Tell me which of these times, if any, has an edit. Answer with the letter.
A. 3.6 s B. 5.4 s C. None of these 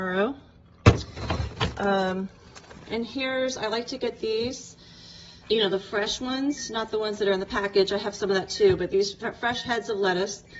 B